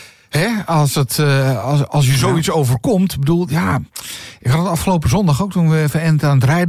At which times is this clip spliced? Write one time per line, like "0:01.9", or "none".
none